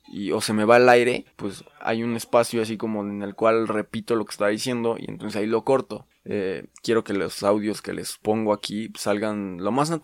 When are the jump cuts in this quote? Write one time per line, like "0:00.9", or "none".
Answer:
0:01.3
0:06.1